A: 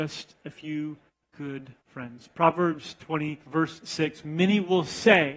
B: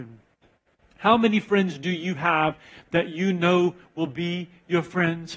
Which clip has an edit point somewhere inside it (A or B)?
A